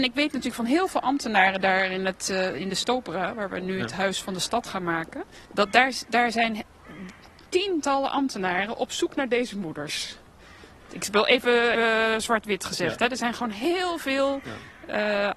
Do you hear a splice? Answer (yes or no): yes